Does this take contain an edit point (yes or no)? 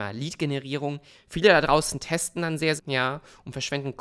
yes